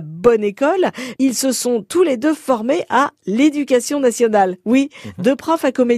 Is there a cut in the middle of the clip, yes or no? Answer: yes